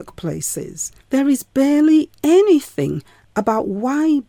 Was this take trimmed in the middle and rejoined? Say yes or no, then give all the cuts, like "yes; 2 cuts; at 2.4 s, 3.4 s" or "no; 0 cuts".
yes; 1 cut; at 1.0 s